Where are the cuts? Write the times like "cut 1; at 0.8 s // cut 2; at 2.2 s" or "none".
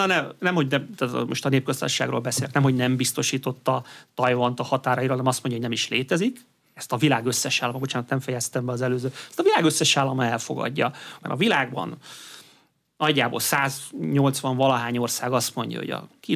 cut 1; at 11.2 s